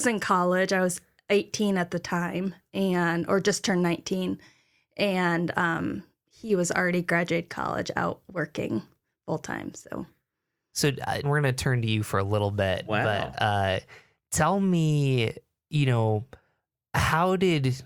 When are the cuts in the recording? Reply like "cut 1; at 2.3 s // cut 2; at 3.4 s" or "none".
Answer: cut 1; at 11.2 s